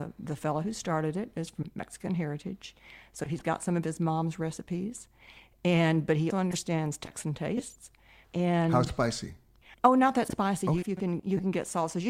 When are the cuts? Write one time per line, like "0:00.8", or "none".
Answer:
0:06.3
0:08.2
0:10.8